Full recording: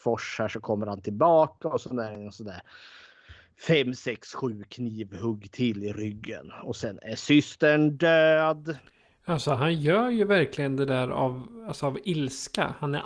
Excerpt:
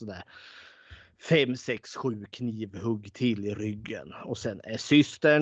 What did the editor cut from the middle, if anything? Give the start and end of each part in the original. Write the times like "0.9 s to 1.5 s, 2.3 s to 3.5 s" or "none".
none